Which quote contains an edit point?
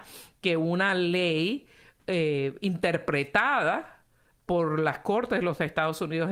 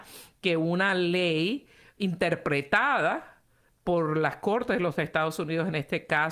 second; 1 cut; at 2.0 s

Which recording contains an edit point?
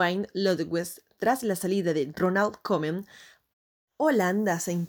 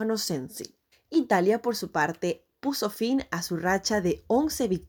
second; 1 cut; at 0.9 s

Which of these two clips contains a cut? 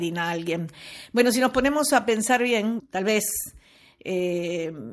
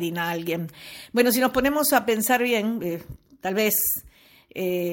first; 1 cut; at 2.8 s

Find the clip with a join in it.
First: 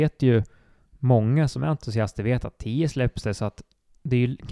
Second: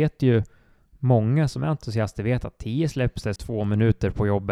second; 1 cut; at 3.4 s

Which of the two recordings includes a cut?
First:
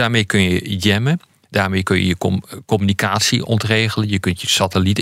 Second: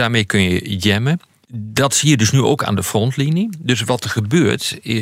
second; 1 cut; at 1.4 s

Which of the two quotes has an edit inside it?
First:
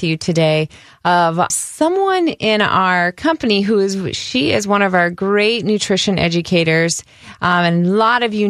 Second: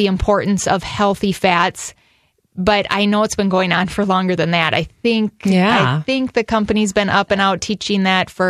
first; 1 cut; at 1.5 s

